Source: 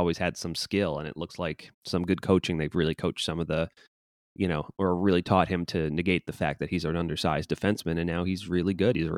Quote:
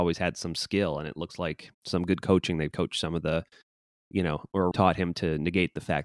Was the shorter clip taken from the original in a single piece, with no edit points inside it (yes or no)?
no